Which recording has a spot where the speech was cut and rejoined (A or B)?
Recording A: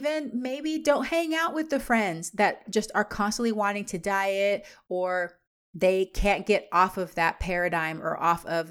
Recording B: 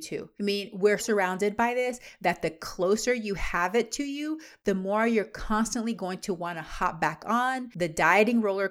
B